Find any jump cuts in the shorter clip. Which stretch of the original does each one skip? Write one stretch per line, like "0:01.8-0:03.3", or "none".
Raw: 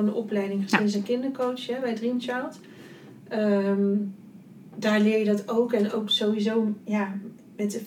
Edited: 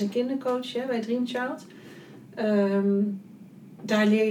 none